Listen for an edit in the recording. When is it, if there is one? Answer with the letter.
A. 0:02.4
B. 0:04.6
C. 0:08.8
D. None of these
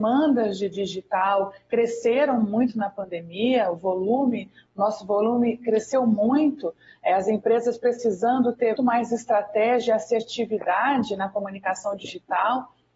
C